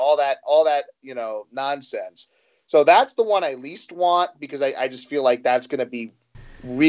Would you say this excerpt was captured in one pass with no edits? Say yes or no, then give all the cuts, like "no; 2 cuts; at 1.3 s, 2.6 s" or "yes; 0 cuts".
yes; 0 cuts